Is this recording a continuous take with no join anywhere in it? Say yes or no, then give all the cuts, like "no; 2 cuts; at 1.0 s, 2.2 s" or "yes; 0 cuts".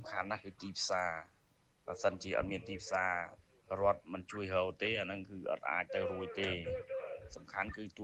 yes; 0 cuts